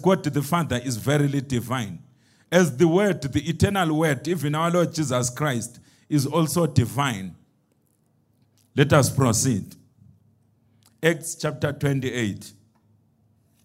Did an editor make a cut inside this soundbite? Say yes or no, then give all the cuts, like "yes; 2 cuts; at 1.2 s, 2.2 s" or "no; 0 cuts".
no; 0 cuts